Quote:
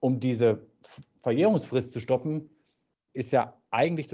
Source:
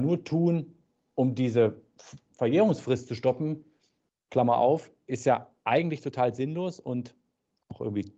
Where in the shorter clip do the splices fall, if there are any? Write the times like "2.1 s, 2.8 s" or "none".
3.1 s